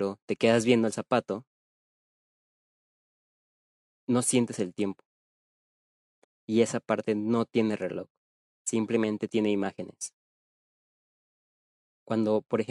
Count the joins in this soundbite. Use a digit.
1